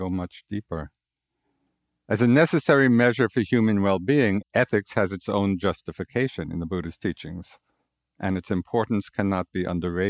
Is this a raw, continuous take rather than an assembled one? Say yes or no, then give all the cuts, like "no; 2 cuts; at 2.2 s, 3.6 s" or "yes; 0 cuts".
no; 1 cut; at 4.4 s